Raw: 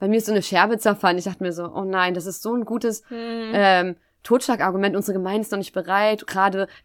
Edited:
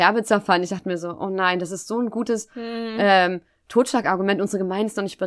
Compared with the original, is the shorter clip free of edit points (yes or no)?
yes